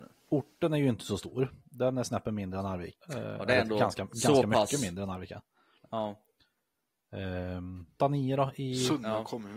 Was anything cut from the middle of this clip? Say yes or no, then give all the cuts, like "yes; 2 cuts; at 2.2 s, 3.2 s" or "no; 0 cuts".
yes; 2 cuts; at 2.9 s, 8.0 s